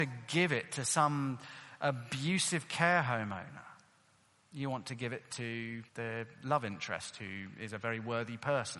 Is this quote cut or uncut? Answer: cut